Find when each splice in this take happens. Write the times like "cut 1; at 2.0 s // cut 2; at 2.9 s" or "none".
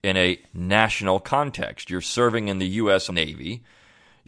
cut 1; at 3.1 s